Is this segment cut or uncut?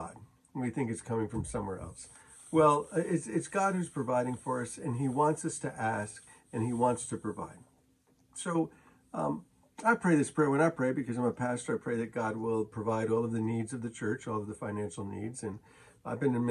uncut